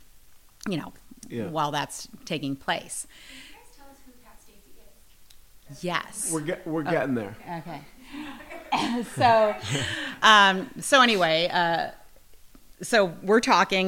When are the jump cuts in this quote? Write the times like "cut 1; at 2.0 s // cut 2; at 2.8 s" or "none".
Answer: none